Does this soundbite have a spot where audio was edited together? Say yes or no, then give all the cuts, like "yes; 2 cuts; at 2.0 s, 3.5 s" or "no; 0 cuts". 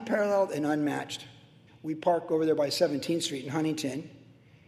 yes; 1 cut; at 1.7 s